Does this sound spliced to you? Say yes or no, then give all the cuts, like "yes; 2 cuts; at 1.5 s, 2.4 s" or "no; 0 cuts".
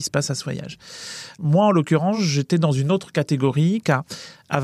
no; 0 cuts